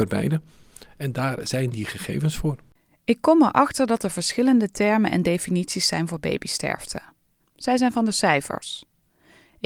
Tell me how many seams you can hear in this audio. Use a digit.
1